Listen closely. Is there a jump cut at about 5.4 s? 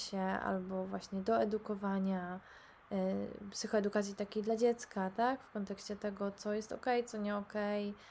no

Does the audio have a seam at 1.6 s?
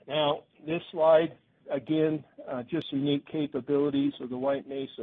yes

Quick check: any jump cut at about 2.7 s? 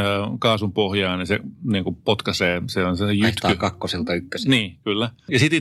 no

